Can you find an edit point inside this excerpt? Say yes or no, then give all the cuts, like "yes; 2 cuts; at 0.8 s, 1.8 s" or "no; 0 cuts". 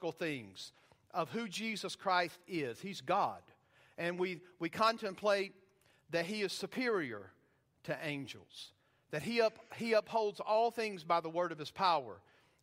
no; 0 cuts